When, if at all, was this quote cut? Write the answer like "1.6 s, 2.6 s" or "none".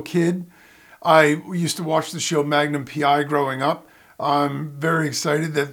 none

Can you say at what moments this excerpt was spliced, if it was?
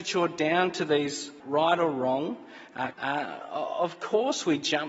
1.4 s, 2.9 s

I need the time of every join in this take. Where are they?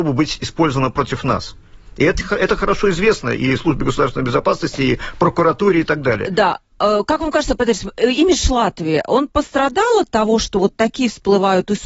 none

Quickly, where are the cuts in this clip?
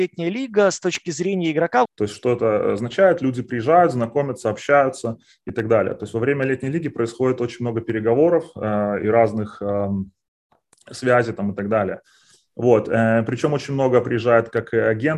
1.9 s

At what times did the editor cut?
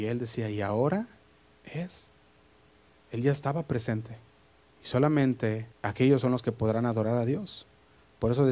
4.7 s, 5.7 s

